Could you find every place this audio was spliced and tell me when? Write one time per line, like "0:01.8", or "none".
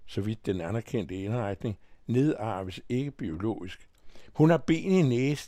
0:04.3